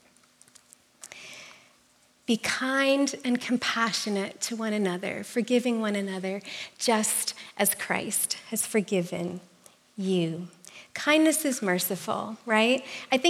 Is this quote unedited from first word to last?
yes; 0 cuts

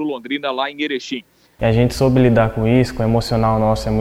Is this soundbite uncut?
no; 1 cut; at 1.6 s

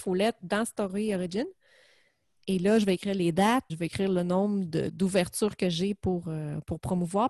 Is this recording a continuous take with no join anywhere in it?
no; 1 cut; at 3.7 s

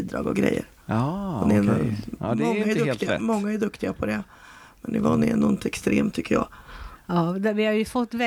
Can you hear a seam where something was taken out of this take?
no; 0 cuts

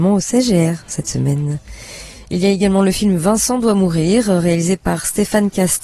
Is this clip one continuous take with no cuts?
yes; 0 cuts

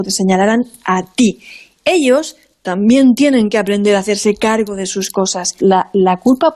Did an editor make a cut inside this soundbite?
yes; 1 cut; at 5.6 s

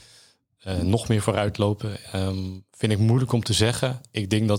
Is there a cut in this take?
no; 0 cuts

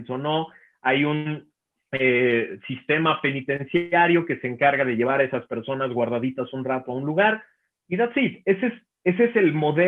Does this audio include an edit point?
no; 0 cuts

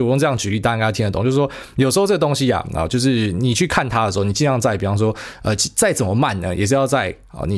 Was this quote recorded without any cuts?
yes; 0 cuts

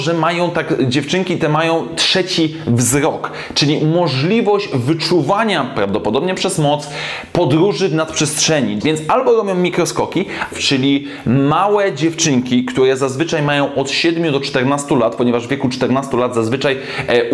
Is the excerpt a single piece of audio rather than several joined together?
no; 2 cuts; at 8.8 s, 10.5 s

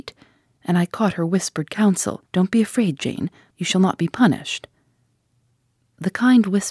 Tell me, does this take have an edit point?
yes; 2 cuts; at 2.3 s, 3.5 s

